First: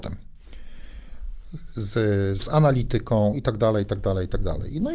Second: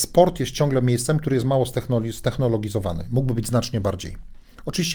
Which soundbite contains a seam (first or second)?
first